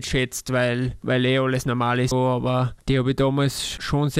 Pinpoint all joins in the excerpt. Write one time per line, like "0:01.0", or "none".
0:02.1